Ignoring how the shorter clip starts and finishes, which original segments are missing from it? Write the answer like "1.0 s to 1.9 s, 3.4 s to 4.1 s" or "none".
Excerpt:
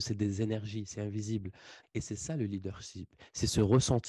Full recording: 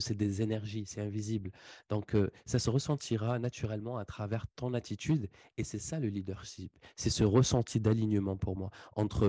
1.8 s to 5.5 s

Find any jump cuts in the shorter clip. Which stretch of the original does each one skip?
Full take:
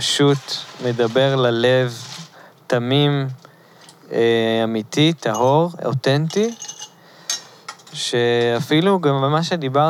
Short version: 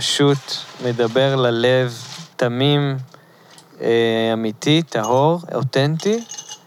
2.3 s to 2.6 s

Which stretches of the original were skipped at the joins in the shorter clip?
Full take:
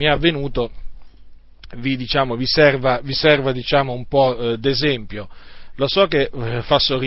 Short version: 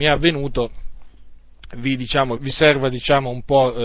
2.4 s to 3.0 s

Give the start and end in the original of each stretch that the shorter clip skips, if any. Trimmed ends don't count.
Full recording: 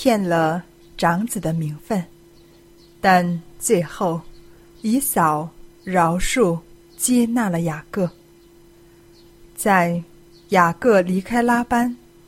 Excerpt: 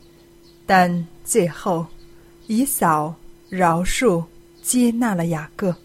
none

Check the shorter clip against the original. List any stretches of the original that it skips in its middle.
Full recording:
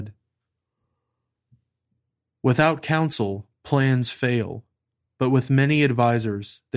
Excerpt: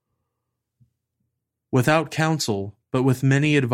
3.6 s to 5.1 s

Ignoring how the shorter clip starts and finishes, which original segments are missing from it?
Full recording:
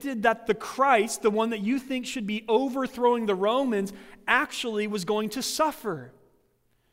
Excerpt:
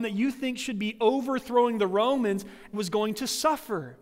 4.2 s to 4.9 s

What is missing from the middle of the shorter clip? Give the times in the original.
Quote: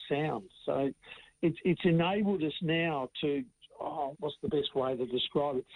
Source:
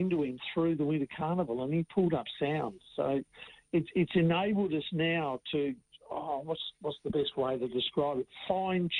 6.4 s to 6.7 s

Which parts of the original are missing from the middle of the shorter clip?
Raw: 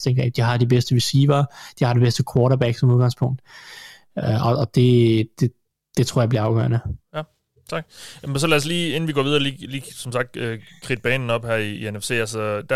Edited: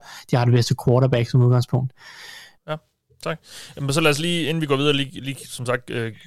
4.1 s to 7.0 s

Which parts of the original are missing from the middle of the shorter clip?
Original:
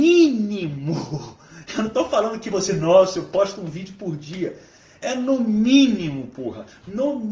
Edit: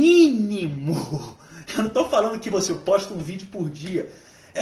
2.7 s to 3.1 s

